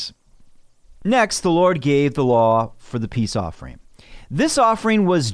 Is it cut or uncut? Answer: uncut